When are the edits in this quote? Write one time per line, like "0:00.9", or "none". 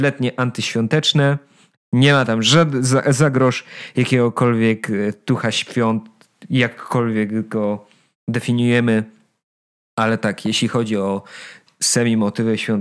none